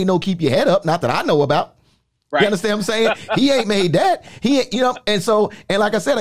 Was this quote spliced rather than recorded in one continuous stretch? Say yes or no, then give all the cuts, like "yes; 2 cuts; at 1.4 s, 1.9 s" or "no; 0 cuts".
no; 0 cuts